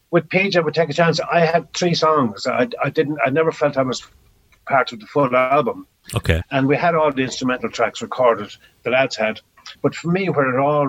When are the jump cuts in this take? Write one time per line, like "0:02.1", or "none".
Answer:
0:06.4
0:09.7